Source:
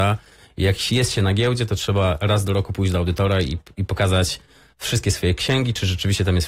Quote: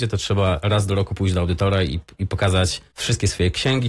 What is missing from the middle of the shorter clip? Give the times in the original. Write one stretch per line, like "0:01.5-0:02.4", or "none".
0:04.5-0:04.7